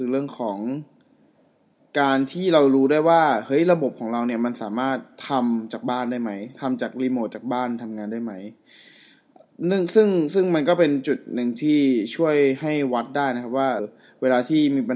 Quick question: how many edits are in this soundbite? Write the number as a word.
one